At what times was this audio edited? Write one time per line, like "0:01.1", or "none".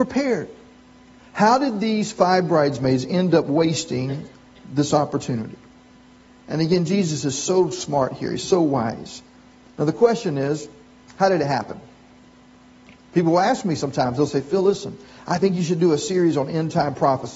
0:01.2
0:09.7
0:13.0